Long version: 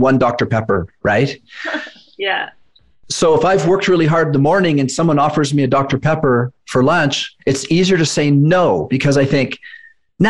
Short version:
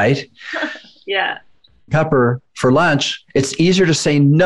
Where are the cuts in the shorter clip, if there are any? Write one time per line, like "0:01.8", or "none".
0:01.9